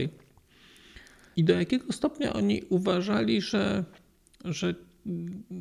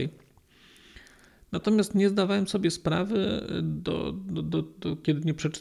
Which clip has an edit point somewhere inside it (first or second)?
first